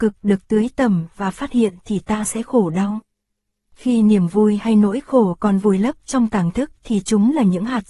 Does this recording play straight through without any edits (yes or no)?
yes